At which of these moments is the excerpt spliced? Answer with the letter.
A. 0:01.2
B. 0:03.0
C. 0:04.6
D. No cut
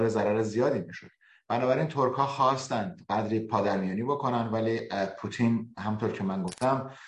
D